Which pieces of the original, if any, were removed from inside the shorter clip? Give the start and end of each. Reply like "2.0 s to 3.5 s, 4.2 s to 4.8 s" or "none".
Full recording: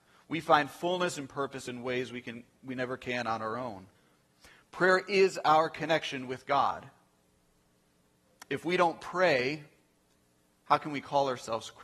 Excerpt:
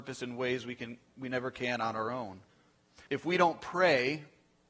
4.5 s to 8.5 s